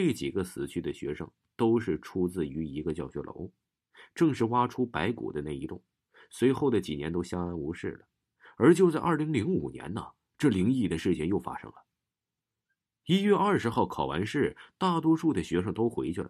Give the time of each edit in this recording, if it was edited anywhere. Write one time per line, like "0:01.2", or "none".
none